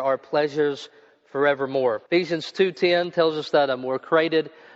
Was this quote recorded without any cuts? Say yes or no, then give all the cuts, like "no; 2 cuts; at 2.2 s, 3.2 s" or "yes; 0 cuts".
no; 1 cut; at 2.1 s